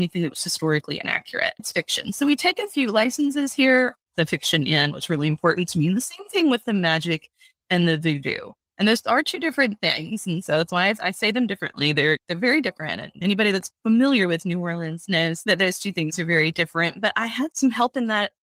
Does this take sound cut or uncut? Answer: cut